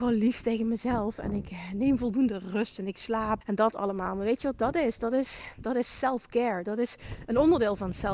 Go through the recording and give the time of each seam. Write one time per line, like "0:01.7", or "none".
0:03.4

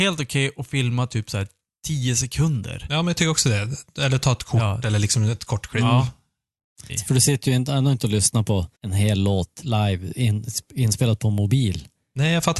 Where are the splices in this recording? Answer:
0:06.9
0:08.7

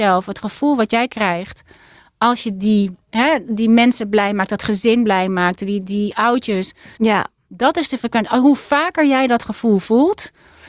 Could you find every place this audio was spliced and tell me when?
0:07.0

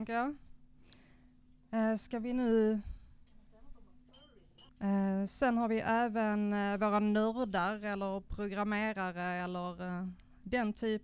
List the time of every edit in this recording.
0:04.7

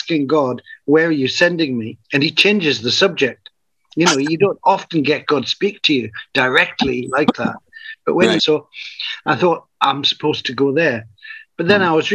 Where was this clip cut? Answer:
0:02.0
0:08.4

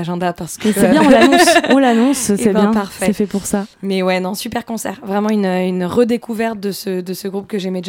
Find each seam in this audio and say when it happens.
none

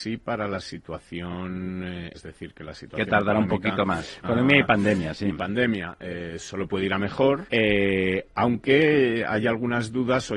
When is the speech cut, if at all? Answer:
0:02.1
0:04.2
0:07.5

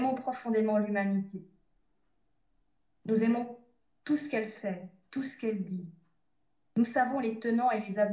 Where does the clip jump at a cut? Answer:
0:06.7

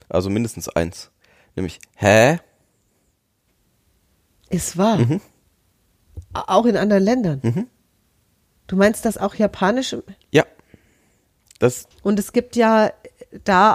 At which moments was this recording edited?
0:11.9

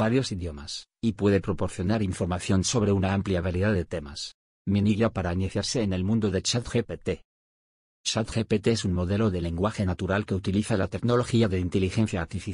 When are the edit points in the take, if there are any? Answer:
0:04.6

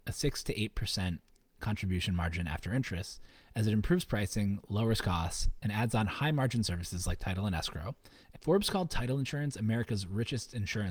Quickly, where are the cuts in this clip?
0:08.3

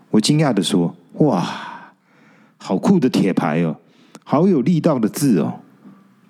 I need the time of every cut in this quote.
none

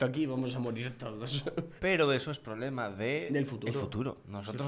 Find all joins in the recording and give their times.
0:01.8

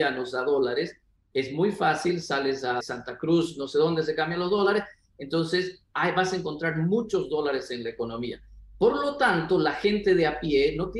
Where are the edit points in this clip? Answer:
0:02.8

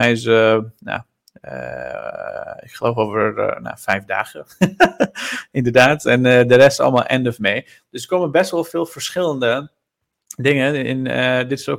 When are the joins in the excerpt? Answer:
none

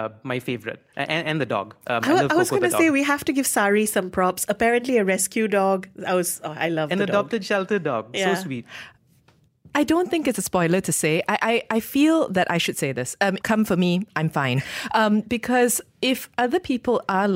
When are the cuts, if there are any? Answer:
0:13.4

